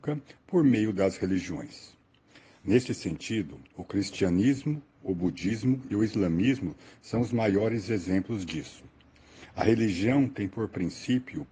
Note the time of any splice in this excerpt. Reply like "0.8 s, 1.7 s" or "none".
none

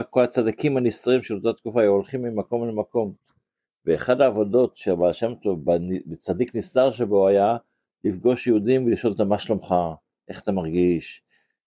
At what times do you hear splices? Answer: none

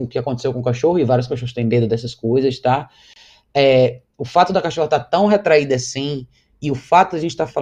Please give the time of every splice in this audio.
none

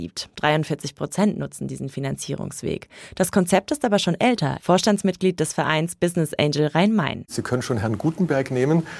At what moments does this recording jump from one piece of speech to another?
4.6 s

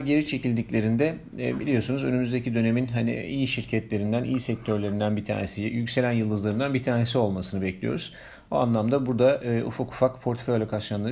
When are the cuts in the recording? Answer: none

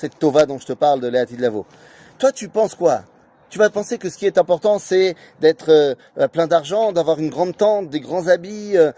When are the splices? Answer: none

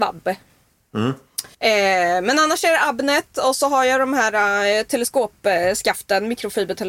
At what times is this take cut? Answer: 1.5 s

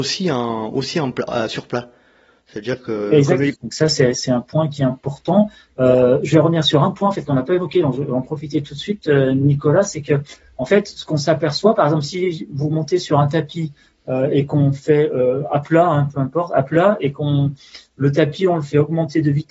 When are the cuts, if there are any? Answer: 3.5 s

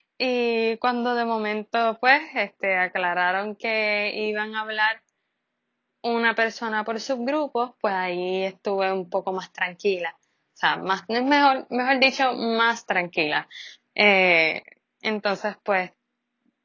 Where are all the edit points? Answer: none

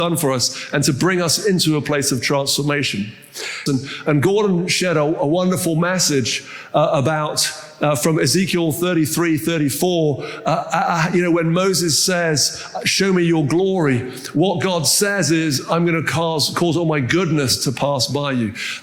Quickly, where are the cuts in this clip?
3.7 s

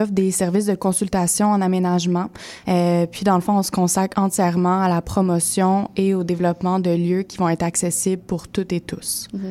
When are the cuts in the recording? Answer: 2.6 s

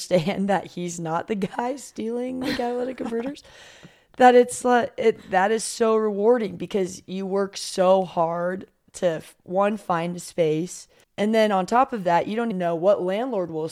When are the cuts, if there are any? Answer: 11.0 s, 12.5 s

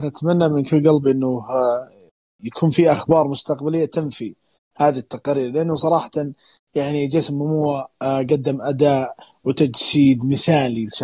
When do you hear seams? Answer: none

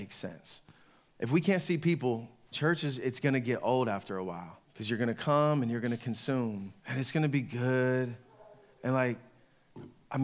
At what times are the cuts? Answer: 2.5 s, 4.6 s, 6.8 s

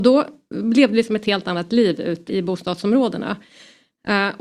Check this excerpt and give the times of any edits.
2.3 s

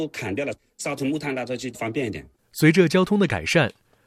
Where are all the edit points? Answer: 2.3 s

